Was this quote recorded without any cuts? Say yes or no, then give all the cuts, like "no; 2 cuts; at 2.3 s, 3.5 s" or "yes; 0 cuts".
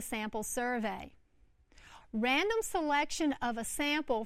no; 1 cut; at 2.0 s